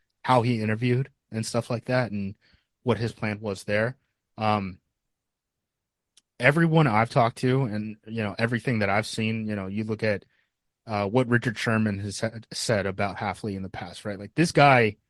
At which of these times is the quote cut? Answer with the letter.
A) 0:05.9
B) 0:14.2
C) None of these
C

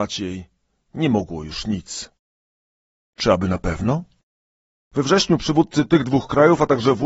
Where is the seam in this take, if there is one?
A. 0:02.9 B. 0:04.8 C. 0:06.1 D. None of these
B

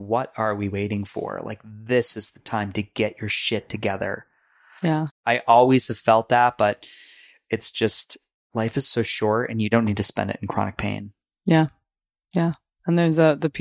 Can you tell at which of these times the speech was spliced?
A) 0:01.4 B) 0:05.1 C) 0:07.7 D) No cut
B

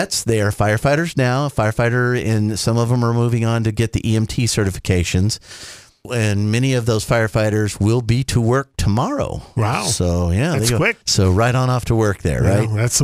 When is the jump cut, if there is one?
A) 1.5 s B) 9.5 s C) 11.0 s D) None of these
C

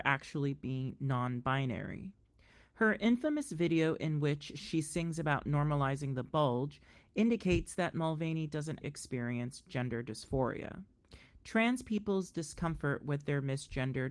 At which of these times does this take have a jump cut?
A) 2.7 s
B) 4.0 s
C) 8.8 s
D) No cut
C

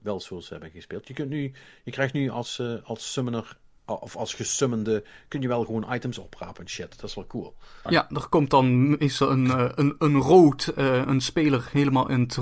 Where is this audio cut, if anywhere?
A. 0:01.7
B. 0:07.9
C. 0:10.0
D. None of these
B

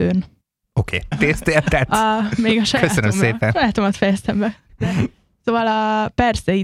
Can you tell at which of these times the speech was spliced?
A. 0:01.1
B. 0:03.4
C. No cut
A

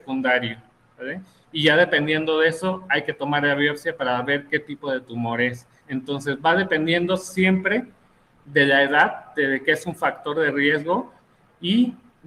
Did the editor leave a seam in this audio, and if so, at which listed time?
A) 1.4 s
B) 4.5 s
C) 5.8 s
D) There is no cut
C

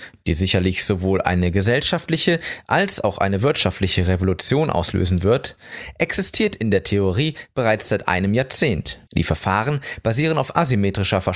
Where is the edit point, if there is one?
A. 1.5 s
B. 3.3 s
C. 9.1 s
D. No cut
C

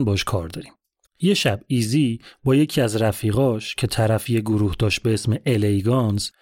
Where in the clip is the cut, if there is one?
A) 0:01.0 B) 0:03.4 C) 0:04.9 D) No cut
A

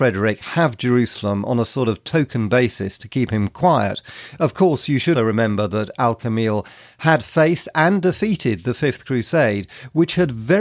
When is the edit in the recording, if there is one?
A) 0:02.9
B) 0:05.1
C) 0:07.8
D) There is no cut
B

